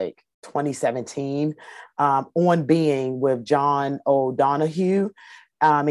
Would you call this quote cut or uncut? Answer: uncut